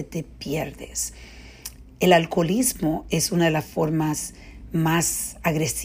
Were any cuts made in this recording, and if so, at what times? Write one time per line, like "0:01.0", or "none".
none